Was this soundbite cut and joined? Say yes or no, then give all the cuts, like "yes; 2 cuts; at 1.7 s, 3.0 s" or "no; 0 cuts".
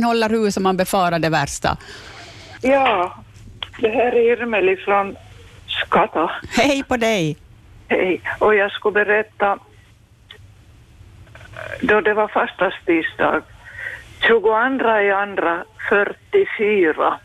yes; 1 cut; at 2.6 s